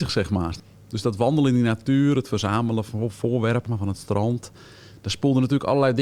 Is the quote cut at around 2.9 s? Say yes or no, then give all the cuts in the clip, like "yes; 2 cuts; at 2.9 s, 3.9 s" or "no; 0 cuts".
yes; 1 cut; at 2.9 s